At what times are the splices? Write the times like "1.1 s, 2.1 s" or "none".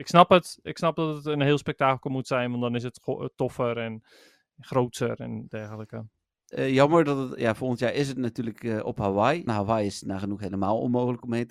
6.5 s, 9.5 s